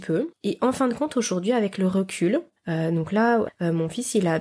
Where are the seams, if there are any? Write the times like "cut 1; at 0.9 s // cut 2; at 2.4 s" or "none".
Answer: cut 1; at 3.5 s